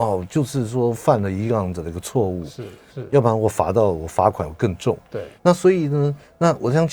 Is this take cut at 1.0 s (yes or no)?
no